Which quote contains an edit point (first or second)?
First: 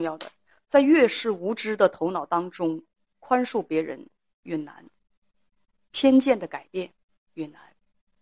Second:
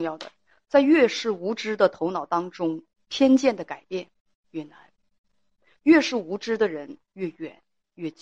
second